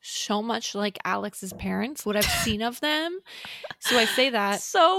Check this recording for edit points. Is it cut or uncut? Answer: cut